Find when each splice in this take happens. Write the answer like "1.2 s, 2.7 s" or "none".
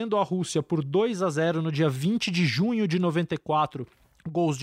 none